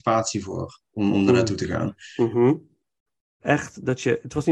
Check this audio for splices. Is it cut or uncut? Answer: cut